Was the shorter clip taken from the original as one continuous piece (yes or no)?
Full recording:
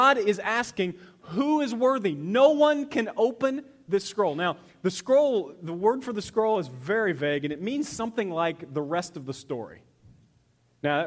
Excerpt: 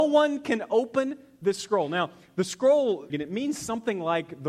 no